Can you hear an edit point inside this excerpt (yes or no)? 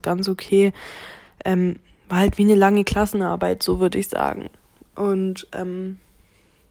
no